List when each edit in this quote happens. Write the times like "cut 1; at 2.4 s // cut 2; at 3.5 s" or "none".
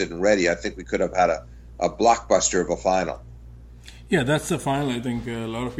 none